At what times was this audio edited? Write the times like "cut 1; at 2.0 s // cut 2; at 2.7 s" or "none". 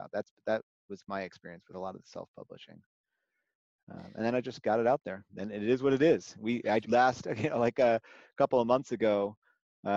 cut 1; at 5.3 s // cut 2; at 6.8 s